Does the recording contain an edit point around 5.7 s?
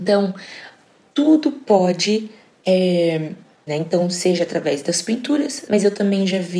yes; 2 cuts; at 3.7 s, 5.7 s

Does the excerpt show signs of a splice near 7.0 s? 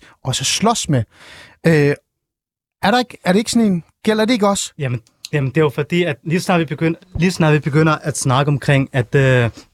yes; 2 cuts; at 4.7 s, 7.0 s

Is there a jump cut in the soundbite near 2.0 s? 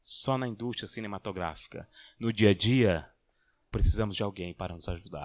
no; 1 cut; at 3.7 s

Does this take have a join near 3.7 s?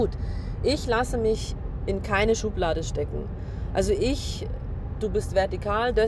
no; 1 cut; at 5.0 s

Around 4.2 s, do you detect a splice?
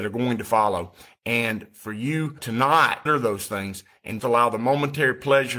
yes; 1 cut; at 4.2 s

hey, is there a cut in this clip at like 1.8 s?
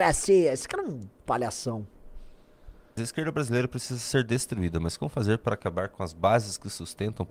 no; 1 cut; at 3.0 s

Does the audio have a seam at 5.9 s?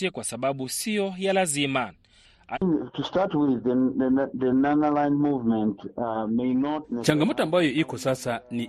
no; 1 cut; at 2.5 s

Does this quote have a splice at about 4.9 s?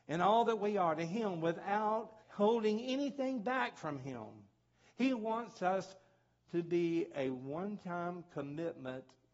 no; 1 cut; at 2.2 s

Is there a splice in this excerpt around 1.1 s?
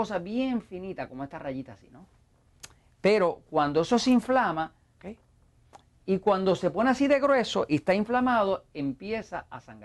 no; 1 cut; at 5.0 s

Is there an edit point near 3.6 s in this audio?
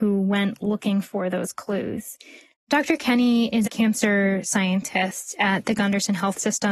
yes; 1 cut; at 3.6 s

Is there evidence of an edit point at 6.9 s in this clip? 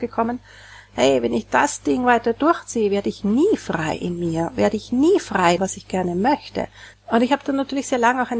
yes; 2 cuts; at 5.6 s, 6.9 s

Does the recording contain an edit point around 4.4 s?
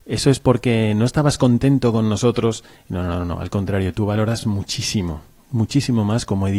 no; 0 cuts

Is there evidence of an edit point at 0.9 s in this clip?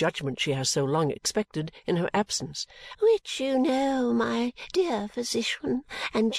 no; 1 cut; at 2.9 s

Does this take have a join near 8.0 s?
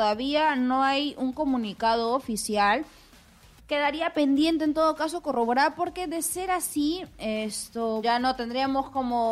yes; 2 cuts; at 3.6 s, 8.0 s

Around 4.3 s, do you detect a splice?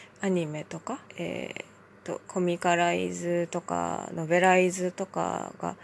no; 2 cuts; at 1.1 s, 2.2 s

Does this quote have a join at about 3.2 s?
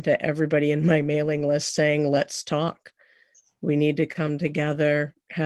no; 0 cuts

